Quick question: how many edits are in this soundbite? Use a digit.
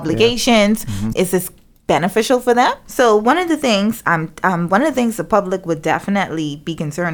2